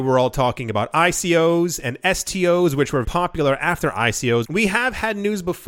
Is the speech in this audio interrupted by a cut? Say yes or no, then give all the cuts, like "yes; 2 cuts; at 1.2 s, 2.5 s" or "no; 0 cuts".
yes; 2 cuts; at 3.0 s, 4.4 s